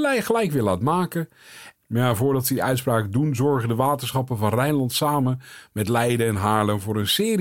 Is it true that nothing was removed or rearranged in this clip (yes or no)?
no